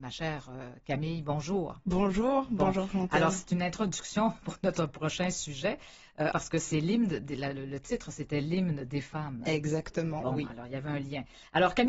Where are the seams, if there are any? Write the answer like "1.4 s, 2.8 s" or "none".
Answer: 6.3 s, 10.2 s